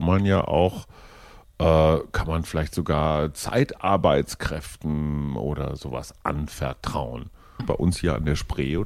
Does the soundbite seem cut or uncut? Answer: cut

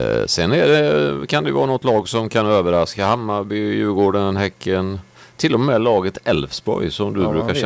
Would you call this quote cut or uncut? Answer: uncut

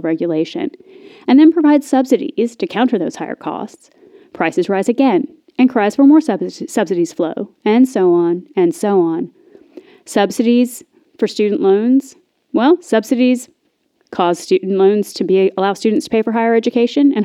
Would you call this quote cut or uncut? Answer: uncut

